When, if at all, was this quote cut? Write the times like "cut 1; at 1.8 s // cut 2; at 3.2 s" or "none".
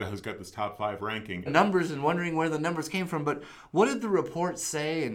cut 1; at 1.5 s